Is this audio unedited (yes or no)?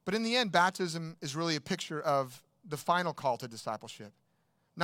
yes